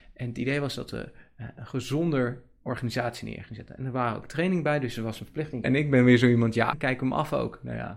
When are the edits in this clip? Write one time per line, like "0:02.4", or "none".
0:05.6
0:06.7